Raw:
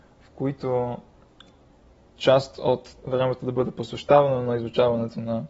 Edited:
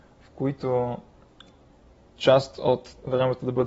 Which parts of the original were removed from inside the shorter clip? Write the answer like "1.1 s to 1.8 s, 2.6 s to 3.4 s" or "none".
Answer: none